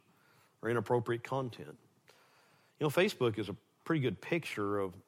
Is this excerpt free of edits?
yes; 0 cuts

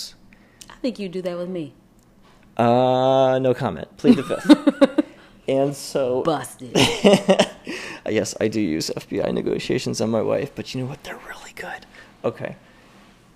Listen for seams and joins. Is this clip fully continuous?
yes; 0 cuts

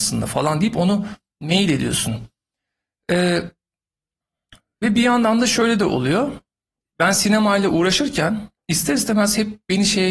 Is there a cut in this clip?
no; 0 cuts

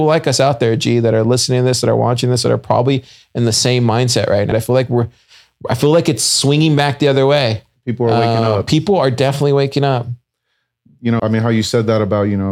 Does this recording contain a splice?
yes; 2 cuts; at 4.5 s, 11.2 s

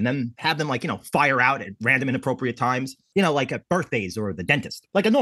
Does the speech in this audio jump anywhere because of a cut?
no; 0 cuts

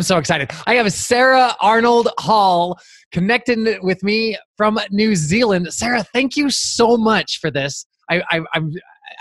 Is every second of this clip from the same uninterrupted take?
yes; 0 cuts

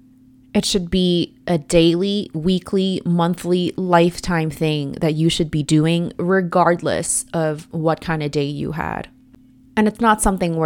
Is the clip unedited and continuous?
no; 1 cut; at 9.7 s

